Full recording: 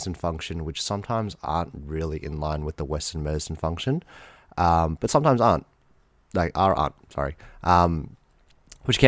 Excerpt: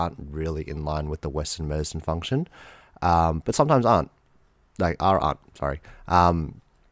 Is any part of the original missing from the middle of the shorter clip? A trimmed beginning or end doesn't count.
no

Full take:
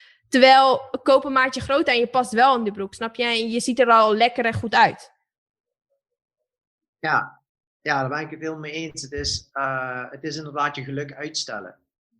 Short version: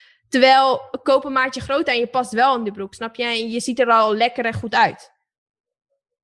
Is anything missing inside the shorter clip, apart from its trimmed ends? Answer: no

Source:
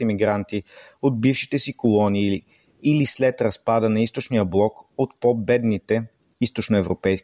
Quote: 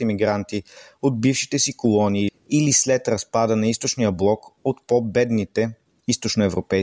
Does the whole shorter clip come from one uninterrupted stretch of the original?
no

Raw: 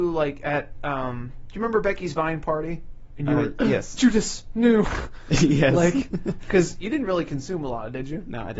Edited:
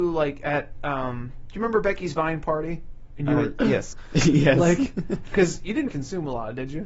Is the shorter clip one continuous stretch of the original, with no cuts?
no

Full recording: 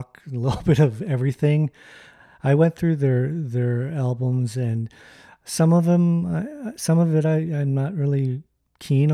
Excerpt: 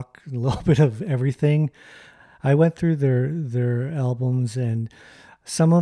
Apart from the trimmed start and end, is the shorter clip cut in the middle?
no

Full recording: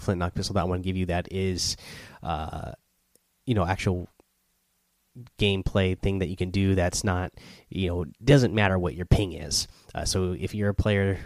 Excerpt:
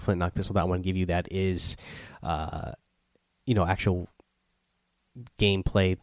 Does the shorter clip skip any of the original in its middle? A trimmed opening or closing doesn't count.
no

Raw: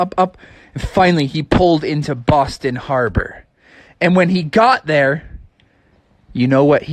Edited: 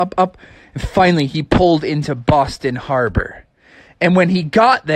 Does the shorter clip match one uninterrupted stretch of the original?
yes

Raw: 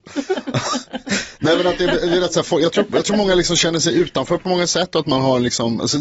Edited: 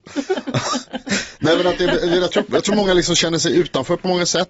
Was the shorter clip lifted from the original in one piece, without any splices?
no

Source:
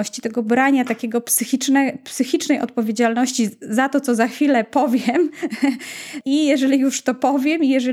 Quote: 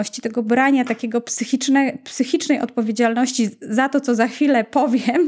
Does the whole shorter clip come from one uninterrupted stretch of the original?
yes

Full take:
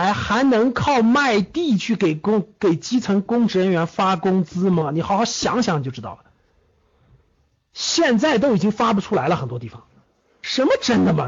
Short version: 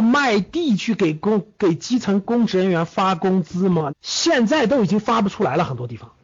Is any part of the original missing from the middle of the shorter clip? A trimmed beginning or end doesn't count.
yes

